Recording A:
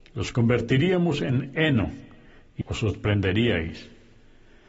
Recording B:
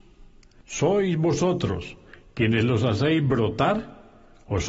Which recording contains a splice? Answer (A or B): A